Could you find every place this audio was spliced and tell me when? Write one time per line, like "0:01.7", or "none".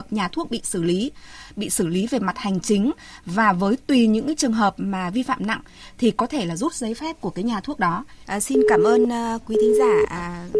0:08.3